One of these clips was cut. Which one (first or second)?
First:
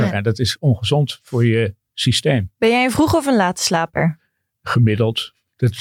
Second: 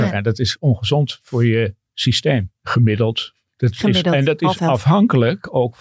second